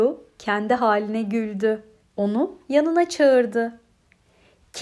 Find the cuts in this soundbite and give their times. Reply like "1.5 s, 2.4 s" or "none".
2.0 s

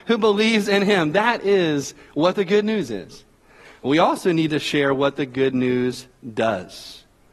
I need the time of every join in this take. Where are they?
none

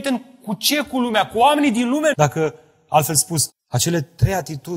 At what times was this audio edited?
2.1 s, 3.5 s

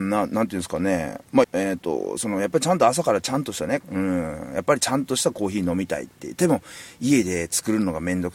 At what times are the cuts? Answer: 1.4 s, 3.8 s

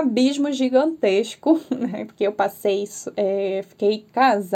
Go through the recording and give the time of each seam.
none

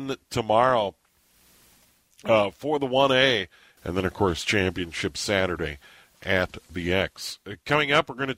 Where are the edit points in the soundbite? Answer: 3.8 s

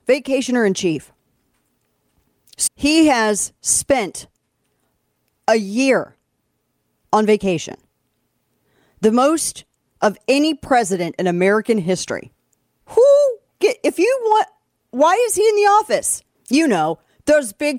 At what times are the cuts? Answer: 2.7 s, 12.8 s, 16.3 s

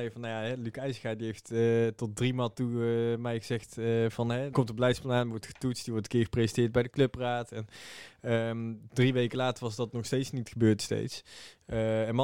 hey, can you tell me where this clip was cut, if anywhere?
4.5 s

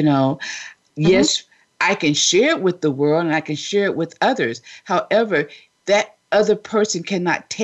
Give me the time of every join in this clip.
none

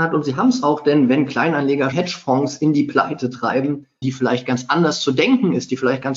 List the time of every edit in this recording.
1.9 s, 4.0 s

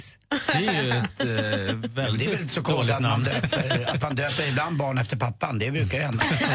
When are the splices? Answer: none

